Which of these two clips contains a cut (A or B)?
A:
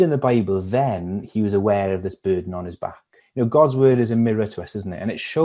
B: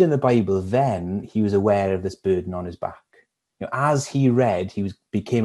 A